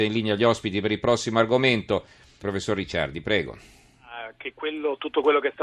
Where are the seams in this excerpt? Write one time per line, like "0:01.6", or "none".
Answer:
0:02.4